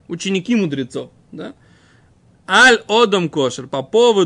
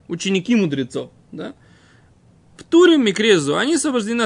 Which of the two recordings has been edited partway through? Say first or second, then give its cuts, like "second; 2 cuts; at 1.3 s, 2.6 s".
first; 1 cut; at 2.3 s